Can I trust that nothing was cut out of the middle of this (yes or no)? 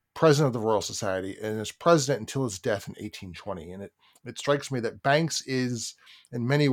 yes